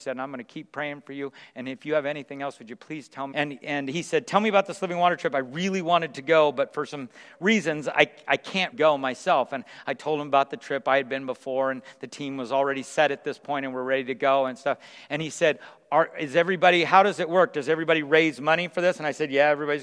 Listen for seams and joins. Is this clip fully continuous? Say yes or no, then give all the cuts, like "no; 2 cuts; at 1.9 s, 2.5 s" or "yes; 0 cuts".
no; 2 cuts; at 3.3 s, 8.7 s